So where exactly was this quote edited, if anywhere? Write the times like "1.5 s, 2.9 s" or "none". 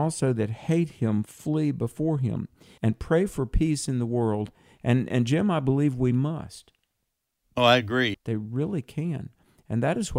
2.8 s, 8.1 s

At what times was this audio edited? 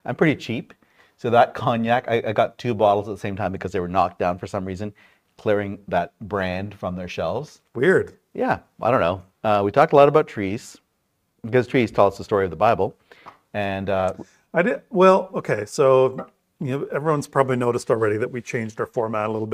9.3 s

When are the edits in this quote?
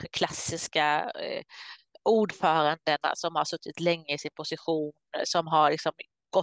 none

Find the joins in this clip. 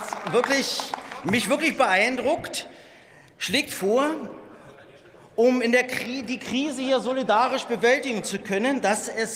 none

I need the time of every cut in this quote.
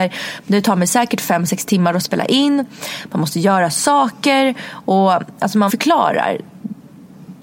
5.7 s

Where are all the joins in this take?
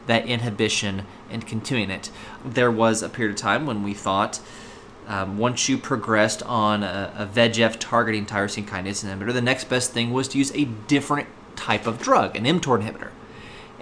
2.4 s

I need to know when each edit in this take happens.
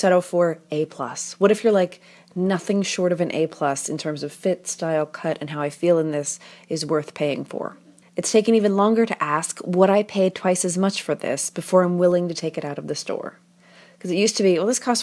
8.0 s

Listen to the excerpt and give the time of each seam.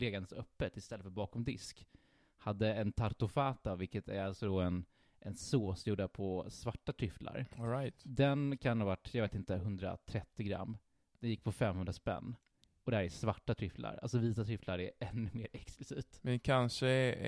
none

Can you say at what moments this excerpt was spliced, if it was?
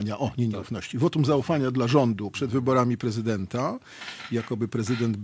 2.3 s

